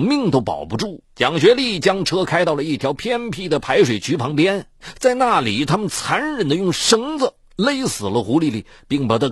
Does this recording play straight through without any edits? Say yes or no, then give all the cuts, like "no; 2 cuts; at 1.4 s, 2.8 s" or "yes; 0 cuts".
no; 1 cut; at 1.0 s